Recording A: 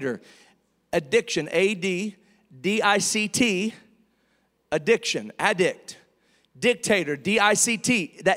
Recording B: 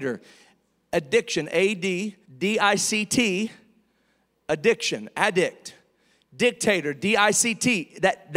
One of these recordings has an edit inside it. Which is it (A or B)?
B